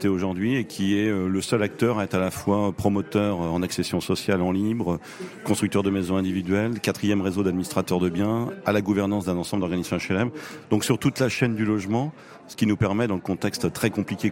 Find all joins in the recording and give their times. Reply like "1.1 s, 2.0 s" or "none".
none